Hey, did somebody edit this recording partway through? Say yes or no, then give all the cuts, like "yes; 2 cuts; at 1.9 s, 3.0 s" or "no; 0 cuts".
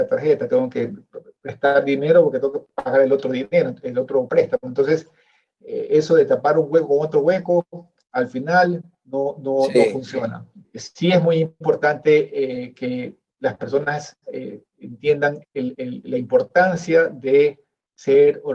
yes; 1 cut; at 10.6 s